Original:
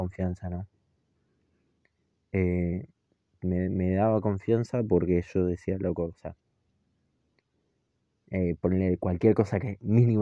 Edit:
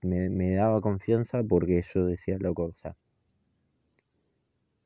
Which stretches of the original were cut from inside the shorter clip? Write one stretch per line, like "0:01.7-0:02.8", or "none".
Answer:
none

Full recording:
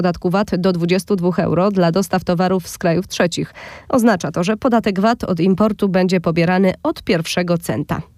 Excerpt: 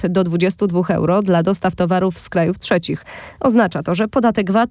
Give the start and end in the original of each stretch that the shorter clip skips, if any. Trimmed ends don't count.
none

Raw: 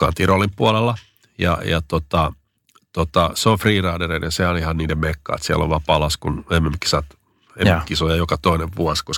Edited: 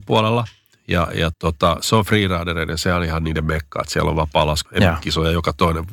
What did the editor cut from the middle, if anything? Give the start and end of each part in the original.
0:01.8-0:02.9
0:06.2-0:07.5

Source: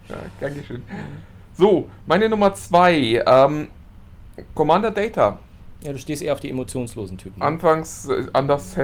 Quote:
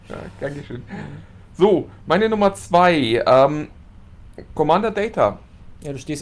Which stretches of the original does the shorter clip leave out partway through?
none

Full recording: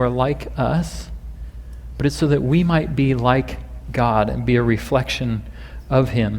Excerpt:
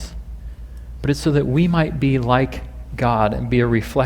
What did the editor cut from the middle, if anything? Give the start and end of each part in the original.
none

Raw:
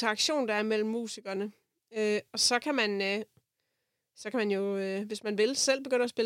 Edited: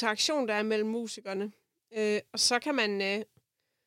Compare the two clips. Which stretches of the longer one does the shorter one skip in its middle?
none

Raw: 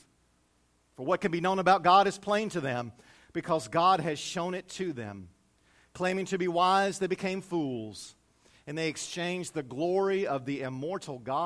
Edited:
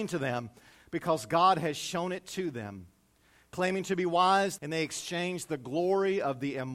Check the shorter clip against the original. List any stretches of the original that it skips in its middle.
0:07.0-0:08.6

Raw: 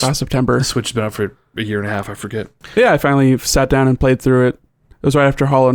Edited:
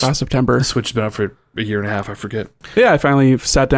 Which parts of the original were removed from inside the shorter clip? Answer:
none

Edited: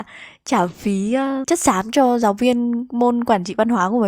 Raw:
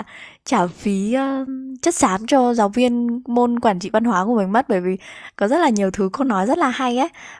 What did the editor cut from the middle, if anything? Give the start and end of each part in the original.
0:01.4-0:01.8

